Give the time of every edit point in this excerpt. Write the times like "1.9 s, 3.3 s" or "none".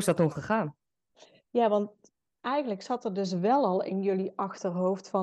none